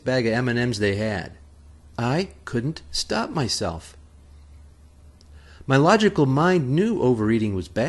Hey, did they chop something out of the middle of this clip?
yes; 1 cut; at 1.9 s

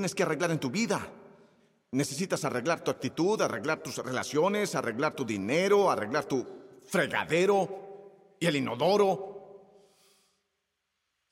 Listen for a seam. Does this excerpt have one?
no; 0 cuts

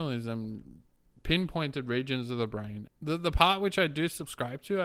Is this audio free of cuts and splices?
no; 1 cut; at 2.9 s

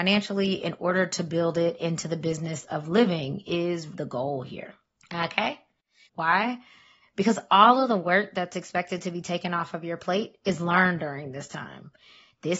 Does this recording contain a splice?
yes; 2 cuts; at 3.9 s, 6.1 s

